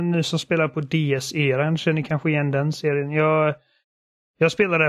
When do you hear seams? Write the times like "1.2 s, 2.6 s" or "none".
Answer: none